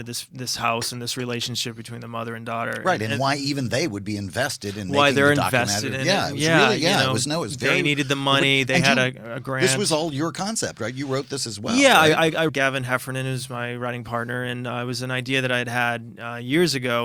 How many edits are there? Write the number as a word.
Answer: one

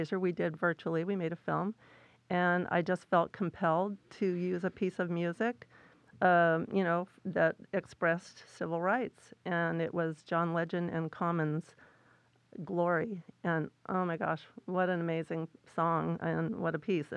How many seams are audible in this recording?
zero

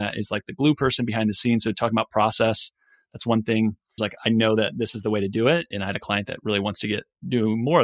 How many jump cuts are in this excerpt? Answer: two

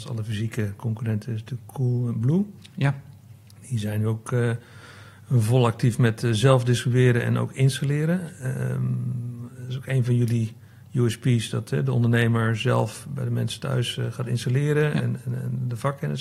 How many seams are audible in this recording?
zero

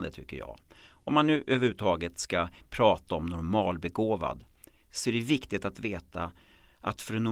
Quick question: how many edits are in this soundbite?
zero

